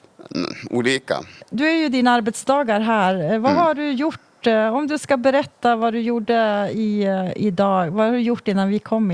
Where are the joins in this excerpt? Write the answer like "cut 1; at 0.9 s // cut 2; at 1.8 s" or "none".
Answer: cut 1; at 1.4 s